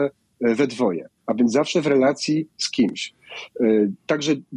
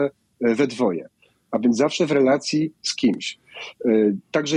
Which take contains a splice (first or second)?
first